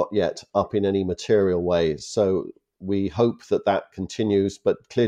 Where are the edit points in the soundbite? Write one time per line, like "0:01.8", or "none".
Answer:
none